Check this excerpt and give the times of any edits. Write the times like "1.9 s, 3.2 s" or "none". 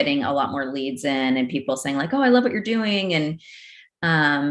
none

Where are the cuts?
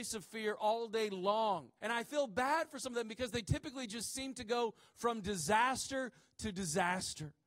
1.8 s

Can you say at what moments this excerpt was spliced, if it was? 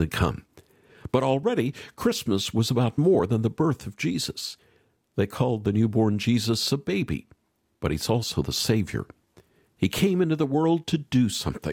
none

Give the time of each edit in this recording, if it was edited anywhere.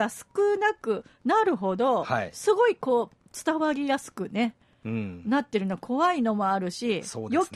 none

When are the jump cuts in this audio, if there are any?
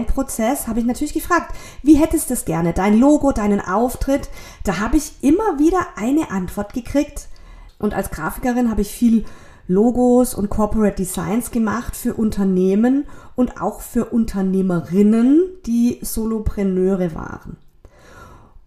7.7 s

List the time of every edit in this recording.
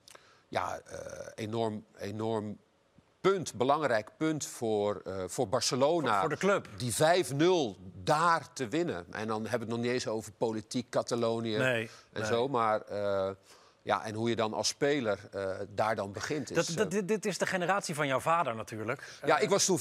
none

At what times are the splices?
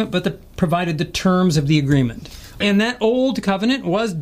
2.6 s

